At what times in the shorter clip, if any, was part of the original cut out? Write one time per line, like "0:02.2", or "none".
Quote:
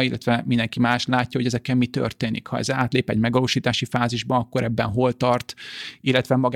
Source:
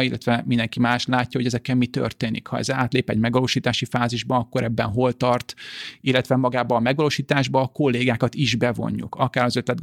none